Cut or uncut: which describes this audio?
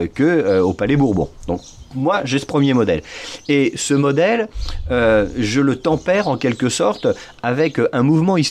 uncut